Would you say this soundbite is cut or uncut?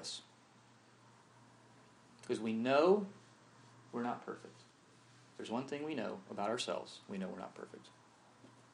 uncut